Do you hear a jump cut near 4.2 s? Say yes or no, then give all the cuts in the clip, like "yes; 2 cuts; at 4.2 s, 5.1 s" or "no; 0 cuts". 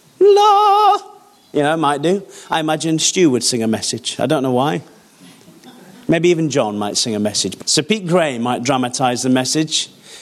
no; 1 cut; at 7.6 s